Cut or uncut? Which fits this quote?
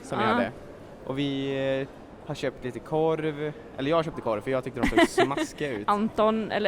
uncut